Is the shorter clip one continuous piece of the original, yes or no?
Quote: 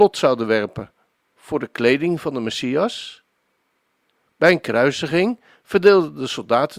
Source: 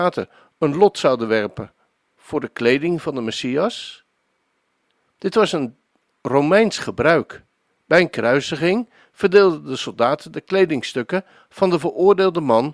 no